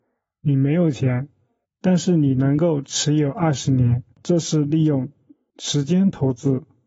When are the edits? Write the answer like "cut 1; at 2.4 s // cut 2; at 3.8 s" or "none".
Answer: cut 1; at 1.6 s // cut 2; at 4.1 s